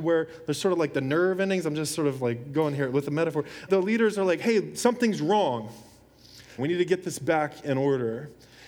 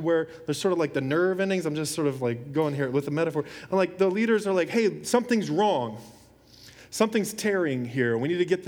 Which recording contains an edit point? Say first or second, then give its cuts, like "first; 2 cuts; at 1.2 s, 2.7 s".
first; 2 cuts; at 3.7 s, 6.6 s